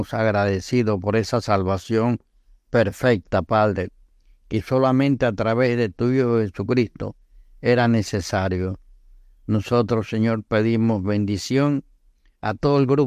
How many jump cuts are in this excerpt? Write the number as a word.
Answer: zero